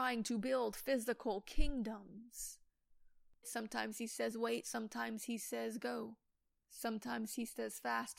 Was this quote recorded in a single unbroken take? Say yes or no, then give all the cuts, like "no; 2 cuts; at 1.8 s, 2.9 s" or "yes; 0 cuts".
no; 1 cut; at 3.4 s